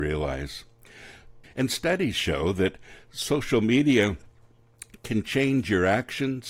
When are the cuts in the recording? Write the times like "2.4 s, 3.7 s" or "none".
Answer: 1.4 s